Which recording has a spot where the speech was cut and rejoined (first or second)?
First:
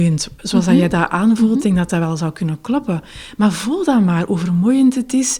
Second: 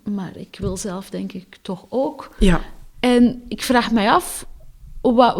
second